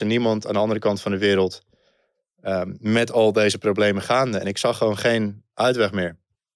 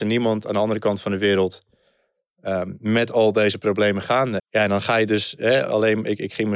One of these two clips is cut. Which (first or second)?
second